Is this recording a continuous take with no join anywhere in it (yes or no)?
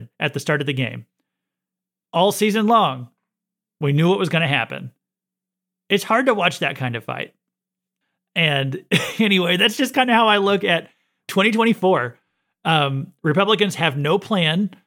yes